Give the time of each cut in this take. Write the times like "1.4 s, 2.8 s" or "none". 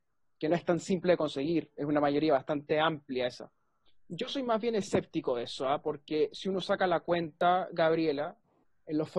3.9 s

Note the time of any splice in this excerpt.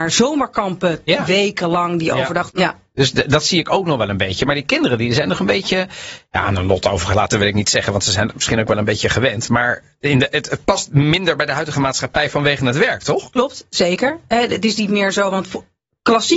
2.5 s

